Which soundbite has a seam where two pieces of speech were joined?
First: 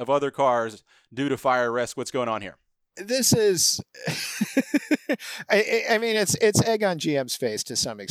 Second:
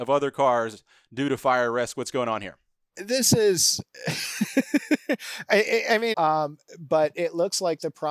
second; 1 cut; at 6.1 s

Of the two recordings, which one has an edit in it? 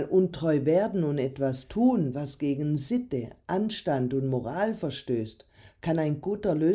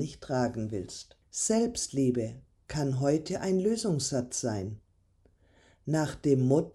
second; 1 cut; at 1.2 s

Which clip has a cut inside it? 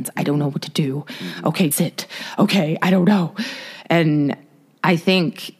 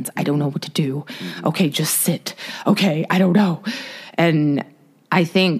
first; 1 cut; at 1.7 s

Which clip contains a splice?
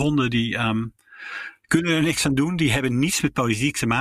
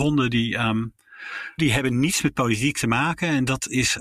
second; 1 cut; at 1.6 s

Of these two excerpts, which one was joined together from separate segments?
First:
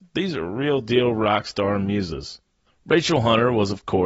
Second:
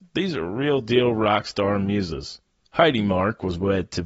second; 1 cut; at 2.7 s

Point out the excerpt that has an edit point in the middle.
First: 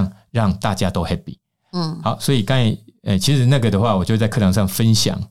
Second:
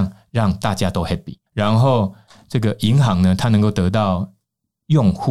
second; 1 cut; at 1.5 s

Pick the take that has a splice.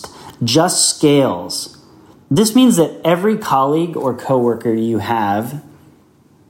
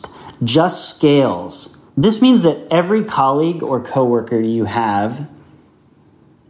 second; 1 cut; at 1.9 s

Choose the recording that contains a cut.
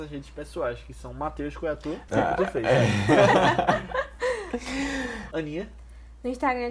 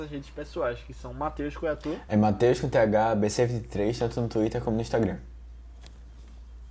first; 2 cuts; at 2.1 s, 5.3 s

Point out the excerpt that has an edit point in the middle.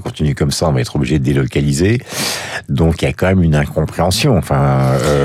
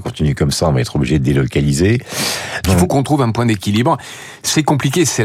second; 1 cut; at 2.6 s

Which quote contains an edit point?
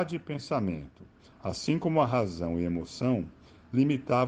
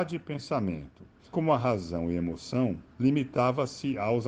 second; 2 cuts; at 1.3 s, 2.9 s

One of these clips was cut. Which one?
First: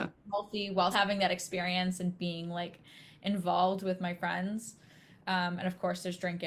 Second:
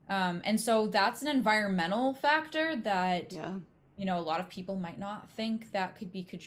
first; 1 cut; at 0.9 s

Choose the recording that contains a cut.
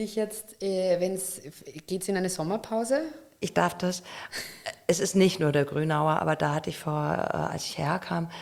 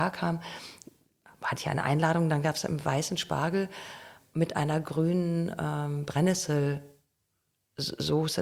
first; 1 cut; at 3.4 s

